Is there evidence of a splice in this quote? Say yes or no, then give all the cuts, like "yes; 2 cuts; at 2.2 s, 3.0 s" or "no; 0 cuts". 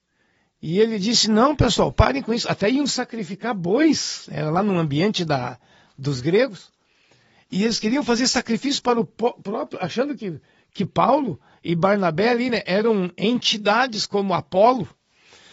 no; 0 cuts